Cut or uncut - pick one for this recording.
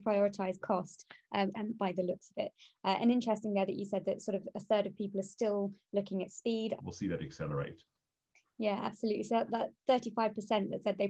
cut